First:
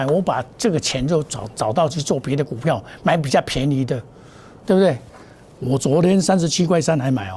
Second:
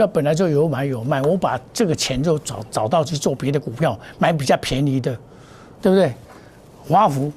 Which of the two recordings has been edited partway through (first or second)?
first